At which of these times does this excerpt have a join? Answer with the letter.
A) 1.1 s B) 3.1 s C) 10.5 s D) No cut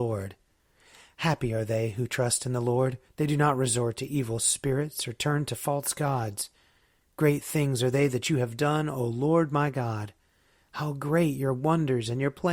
B